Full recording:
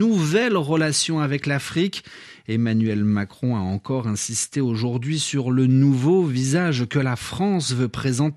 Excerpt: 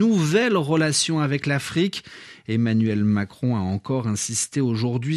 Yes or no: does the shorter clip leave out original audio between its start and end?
no